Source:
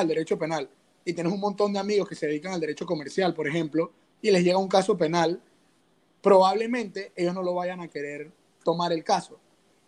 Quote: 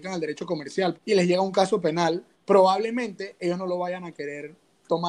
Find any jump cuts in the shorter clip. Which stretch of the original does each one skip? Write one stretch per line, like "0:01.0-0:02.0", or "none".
0:03.3-0:04.1
0:05.5-0:06.1